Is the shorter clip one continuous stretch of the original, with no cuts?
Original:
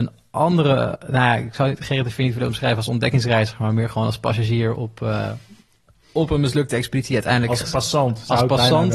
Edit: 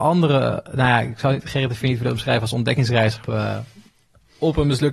no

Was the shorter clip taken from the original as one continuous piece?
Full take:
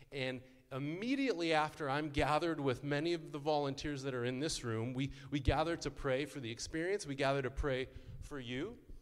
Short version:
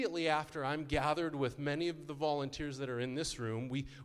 yes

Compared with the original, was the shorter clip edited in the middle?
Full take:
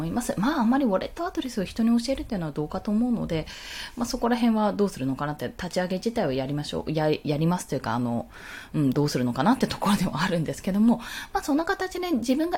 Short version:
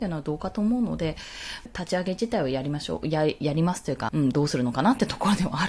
yes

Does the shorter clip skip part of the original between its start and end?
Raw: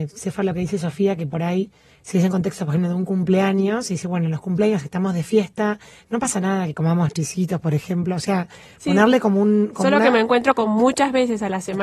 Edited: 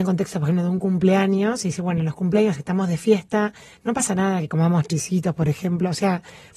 no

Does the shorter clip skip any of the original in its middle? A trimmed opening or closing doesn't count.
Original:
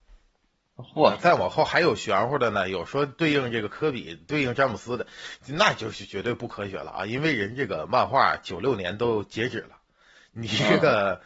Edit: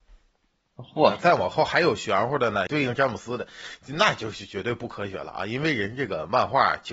yes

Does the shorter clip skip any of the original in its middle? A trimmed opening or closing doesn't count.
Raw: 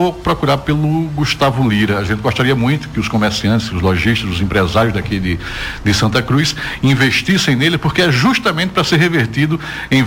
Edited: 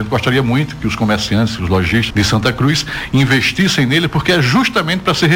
yes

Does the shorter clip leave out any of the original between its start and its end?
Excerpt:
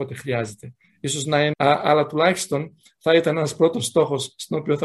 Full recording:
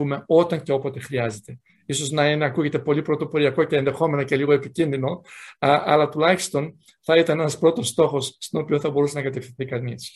yes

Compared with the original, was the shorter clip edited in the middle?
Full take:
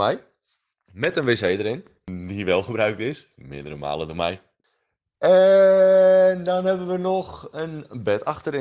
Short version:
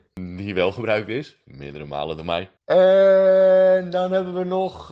yes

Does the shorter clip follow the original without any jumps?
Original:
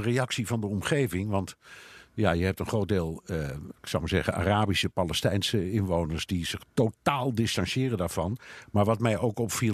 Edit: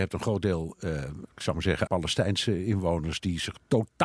no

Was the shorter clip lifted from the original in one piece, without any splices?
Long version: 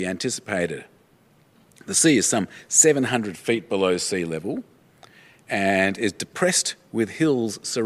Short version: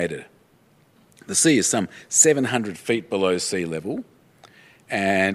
yes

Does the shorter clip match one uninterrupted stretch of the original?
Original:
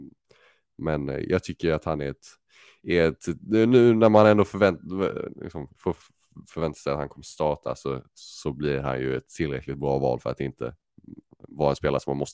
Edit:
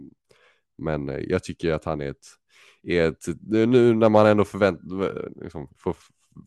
yes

